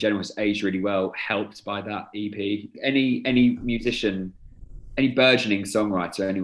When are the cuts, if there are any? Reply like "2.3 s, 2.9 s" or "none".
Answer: 2.7 s